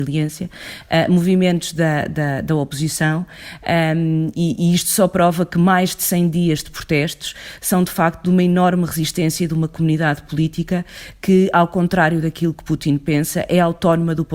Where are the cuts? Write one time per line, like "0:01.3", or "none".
none